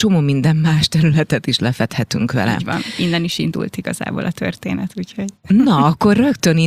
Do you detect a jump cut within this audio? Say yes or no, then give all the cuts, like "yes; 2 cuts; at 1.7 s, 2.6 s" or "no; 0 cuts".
no; 0 cuts